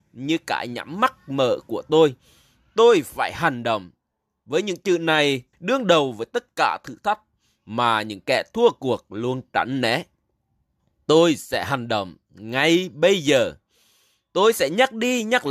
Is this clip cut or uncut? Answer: cut